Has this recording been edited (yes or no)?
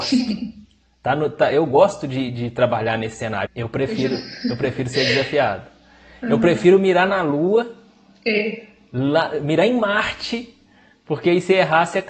yes